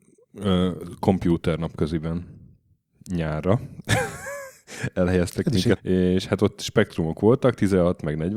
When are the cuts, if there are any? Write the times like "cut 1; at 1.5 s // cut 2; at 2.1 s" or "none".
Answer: cut 1; at 5.8 s